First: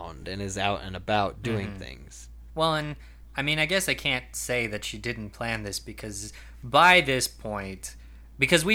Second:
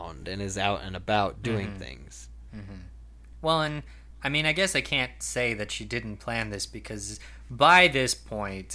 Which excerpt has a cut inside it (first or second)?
first